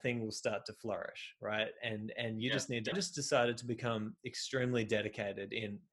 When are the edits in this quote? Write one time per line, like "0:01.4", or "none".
0:02.9